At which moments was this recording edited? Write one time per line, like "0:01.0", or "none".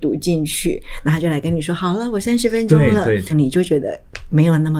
0:03.3

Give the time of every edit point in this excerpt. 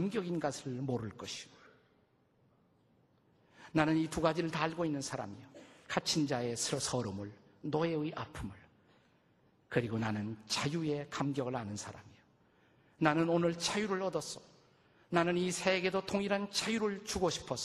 none

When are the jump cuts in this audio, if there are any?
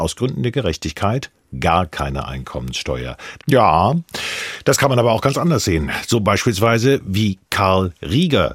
0:03.4

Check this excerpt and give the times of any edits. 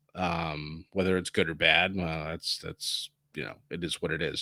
none

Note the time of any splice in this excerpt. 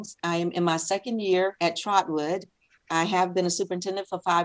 none

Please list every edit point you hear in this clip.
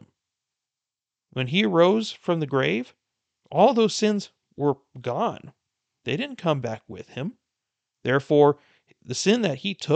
0:07.9

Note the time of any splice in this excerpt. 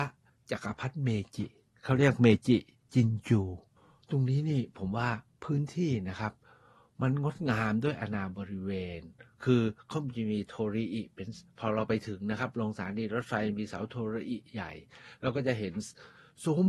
none

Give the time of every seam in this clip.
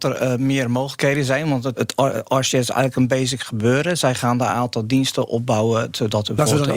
0:01.7

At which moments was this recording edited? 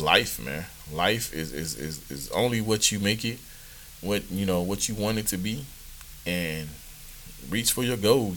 none

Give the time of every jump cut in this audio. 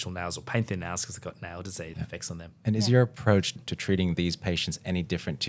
0:01.9
0:03.6

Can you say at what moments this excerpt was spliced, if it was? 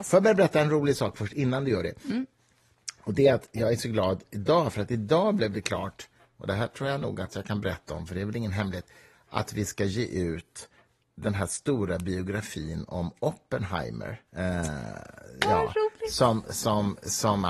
0:14.3

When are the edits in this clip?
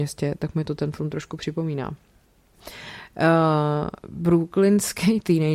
0:02.5

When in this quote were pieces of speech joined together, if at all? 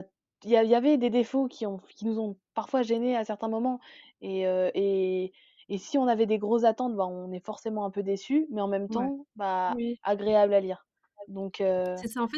none

